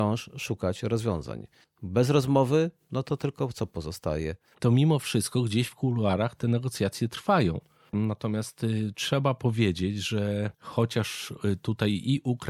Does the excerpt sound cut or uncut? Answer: cut